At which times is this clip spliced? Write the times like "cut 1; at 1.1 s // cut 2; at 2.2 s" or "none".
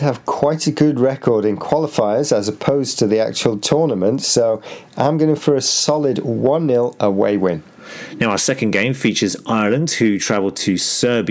none